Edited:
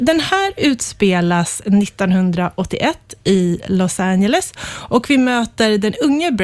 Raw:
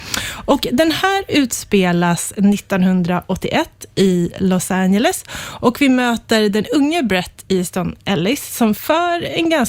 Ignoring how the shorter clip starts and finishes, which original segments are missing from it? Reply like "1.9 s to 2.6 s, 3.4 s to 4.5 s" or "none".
none